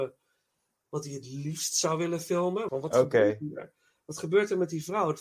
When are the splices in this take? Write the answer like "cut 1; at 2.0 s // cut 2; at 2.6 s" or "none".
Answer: cut 1; at 2.7 s